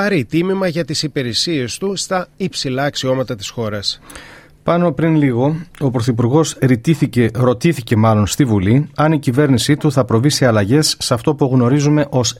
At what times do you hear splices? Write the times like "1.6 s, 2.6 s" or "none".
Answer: none